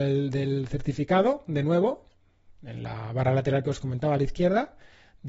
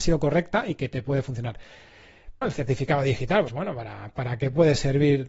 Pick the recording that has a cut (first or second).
second